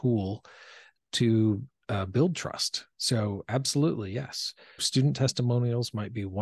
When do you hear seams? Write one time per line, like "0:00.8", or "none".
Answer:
0:04.8